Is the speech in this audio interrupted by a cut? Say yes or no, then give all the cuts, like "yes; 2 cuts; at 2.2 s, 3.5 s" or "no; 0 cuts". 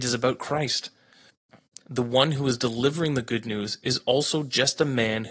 no; 0 cuts